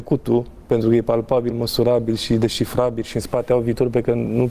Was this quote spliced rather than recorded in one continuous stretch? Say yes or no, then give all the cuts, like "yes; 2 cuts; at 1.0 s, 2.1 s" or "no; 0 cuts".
no; 0 cuts